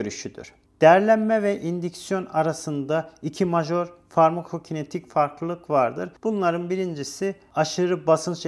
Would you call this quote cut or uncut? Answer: uncut